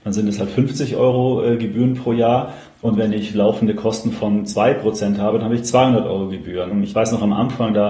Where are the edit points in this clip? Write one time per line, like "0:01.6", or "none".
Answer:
0:06.7